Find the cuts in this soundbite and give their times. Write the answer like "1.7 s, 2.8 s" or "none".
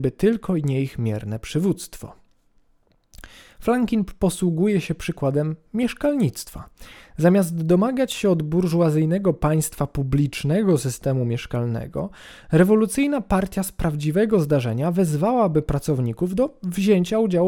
none